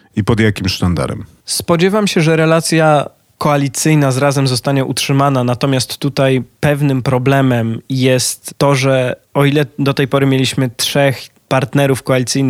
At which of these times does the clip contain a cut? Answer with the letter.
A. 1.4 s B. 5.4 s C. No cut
A